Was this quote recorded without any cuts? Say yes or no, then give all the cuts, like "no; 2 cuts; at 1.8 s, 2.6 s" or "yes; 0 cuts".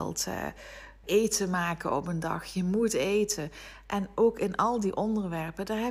no; 1 cut; at 1.0 s